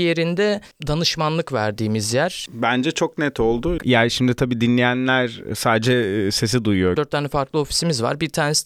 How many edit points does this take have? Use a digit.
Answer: 3